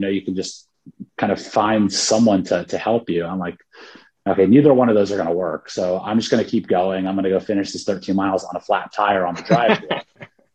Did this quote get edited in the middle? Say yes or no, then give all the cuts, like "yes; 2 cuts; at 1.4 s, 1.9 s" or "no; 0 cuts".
no; 0 cuts